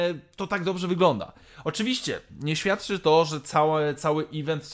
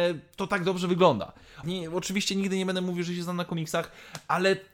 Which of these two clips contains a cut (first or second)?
second